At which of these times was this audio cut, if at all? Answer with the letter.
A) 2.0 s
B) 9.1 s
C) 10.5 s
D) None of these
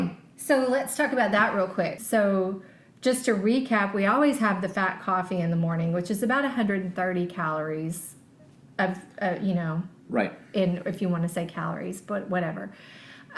A